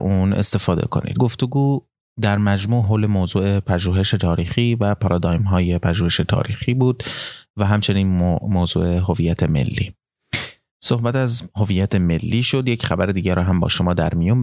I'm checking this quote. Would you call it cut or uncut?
uncut